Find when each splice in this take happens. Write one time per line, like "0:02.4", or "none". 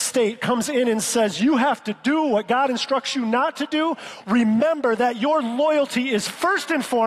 0:04.2